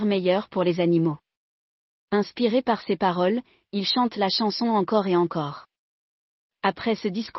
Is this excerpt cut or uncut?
uncut